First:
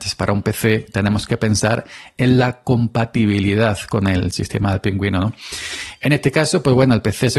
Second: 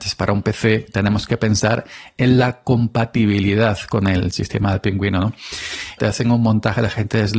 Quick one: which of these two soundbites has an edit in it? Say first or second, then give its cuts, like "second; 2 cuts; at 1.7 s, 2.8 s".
second; 1 cut; at 6.0 s